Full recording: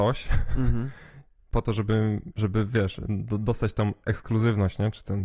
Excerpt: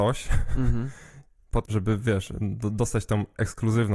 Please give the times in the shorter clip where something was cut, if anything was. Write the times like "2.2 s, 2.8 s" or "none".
1.7 s